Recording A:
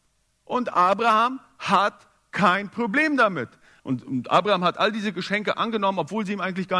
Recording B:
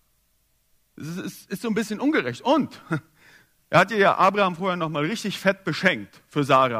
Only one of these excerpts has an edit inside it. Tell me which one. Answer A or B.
A